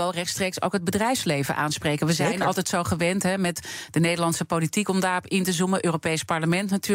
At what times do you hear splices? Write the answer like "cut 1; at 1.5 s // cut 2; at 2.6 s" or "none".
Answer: none